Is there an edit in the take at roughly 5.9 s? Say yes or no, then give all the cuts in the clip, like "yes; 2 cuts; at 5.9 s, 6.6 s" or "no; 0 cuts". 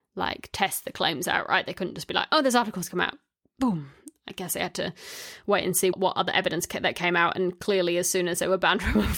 yes; 1 cut; at 5.9 s